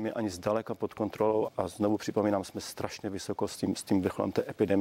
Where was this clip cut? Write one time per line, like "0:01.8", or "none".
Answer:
0:01.5